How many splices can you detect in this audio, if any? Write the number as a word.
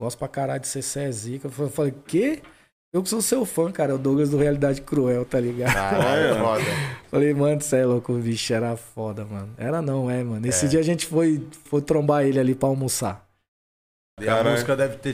two